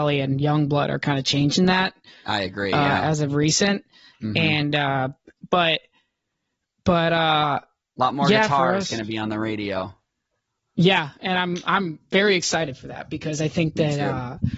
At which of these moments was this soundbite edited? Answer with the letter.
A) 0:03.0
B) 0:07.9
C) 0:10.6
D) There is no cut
D